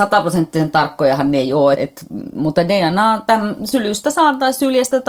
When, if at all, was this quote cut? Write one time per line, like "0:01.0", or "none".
0:01.8